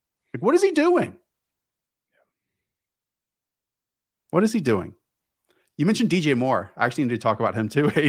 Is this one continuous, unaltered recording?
yes; 0 cuts

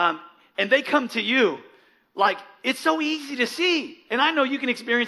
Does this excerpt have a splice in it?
no; 0 cuts

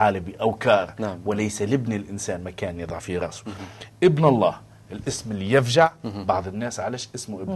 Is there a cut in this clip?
no; 0 cuts

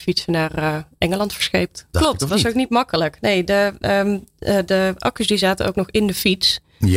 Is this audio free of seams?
no; 1 cut; at 1.9 s

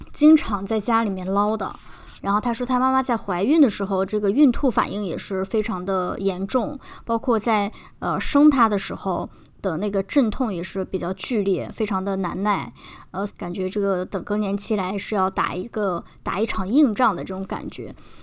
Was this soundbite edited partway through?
yes; 2 cuts; at 2.2 s, 13.3 s

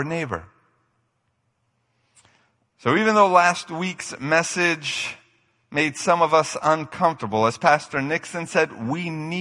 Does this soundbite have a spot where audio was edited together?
no; 0 cuts

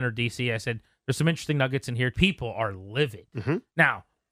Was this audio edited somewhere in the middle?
yes; 1 cut; at 2.1 s

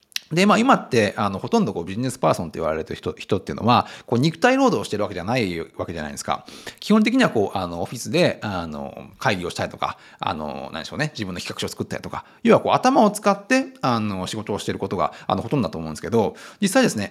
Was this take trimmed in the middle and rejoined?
no; 0 cuts

